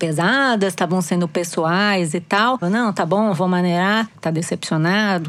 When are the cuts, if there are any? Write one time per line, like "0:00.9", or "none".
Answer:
0:02.6
0:04.1